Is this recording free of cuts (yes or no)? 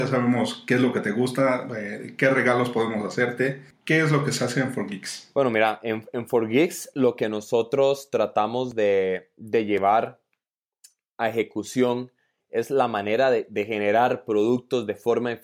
yes